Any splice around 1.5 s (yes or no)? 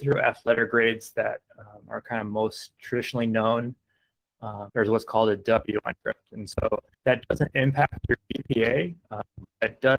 no